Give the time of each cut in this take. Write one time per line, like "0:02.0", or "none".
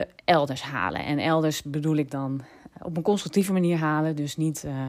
none